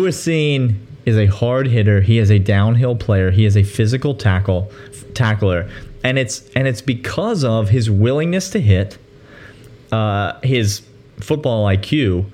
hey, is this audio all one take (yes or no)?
yes